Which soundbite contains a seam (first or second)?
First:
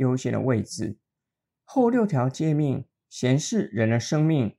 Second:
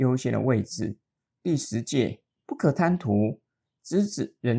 second